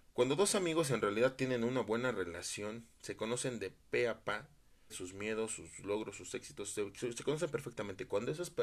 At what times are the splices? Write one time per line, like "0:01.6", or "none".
0:04.9

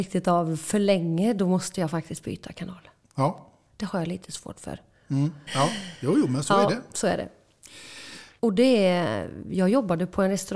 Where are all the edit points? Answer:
0:03.7
0:05.5
0:08.4

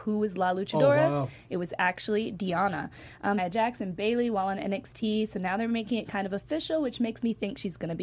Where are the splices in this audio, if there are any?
0:03.4

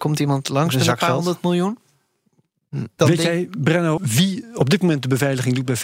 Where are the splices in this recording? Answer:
0:04.0

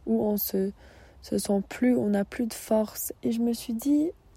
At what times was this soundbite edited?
0:03.2

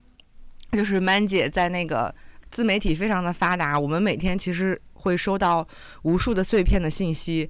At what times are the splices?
0:02.4

